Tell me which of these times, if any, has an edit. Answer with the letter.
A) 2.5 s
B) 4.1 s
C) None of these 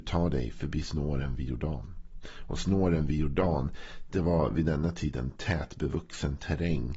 C